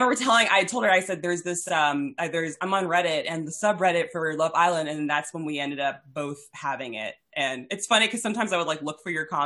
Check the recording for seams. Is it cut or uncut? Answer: uncut